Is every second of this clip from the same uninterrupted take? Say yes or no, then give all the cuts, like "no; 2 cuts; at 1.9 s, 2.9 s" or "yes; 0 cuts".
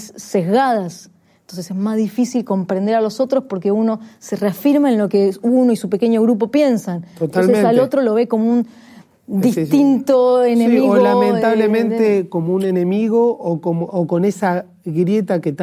yes; 0 cuts